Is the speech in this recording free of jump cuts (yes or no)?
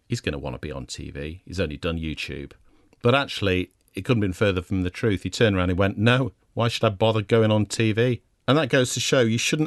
no